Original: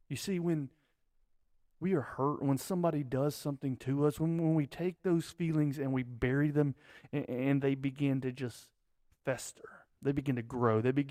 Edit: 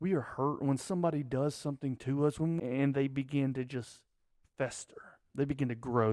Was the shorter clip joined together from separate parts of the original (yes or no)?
yes